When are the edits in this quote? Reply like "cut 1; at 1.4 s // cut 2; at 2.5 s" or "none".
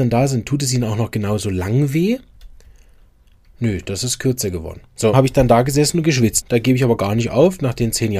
cut 1; at 5.1 s // cut 2; at 6.4 s